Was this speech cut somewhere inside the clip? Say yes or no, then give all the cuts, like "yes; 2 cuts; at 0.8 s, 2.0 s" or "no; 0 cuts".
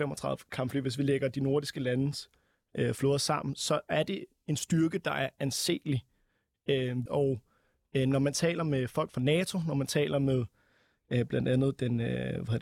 yes; 1 cut; at 7.1 s